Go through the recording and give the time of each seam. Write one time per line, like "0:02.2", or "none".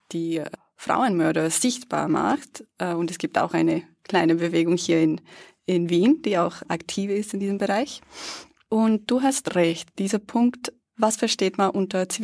none